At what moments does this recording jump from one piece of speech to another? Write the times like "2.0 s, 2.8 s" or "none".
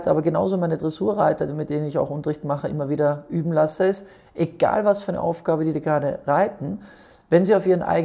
none